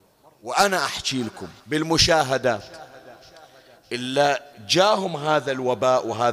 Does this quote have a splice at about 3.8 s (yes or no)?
no